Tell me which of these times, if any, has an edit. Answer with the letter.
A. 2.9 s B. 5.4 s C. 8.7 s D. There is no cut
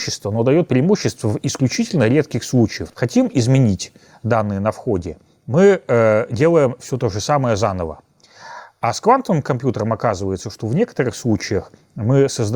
A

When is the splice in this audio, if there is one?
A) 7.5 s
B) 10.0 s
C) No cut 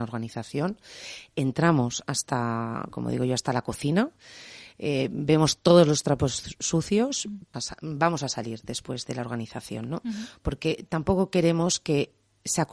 A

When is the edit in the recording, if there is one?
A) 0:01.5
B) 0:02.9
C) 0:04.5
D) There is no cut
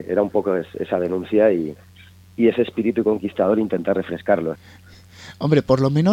C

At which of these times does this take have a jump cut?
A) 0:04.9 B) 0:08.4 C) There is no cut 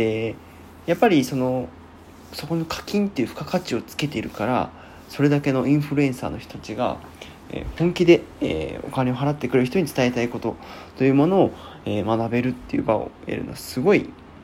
C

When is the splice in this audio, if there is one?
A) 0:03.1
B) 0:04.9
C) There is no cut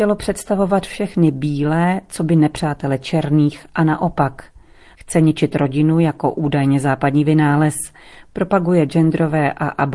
B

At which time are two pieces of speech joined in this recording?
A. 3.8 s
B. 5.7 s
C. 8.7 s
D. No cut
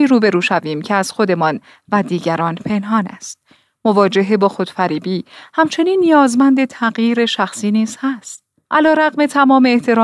C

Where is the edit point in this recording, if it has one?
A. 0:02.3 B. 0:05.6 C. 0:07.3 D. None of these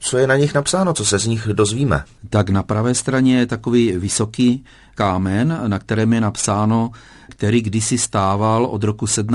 C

